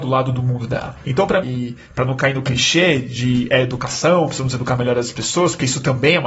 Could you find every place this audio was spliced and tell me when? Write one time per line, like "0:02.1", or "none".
0:01.4